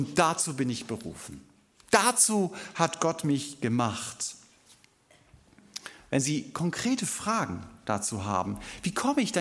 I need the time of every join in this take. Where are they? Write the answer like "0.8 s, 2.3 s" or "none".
none